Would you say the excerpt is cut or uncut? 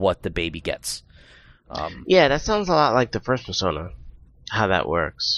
uncut